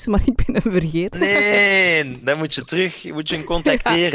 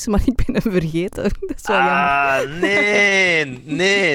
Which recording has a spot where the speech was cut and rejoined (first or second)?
first